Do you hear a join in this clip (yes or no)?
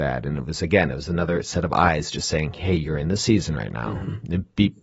no